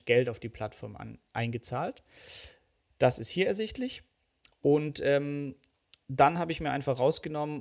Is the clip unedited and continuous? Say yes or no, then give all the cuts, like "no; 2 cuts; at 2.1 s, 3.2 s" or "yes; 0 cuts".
yes; 0 cuts